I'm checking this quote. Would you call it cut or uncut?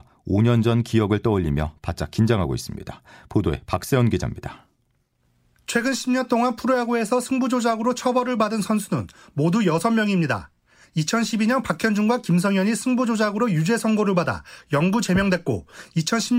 uncut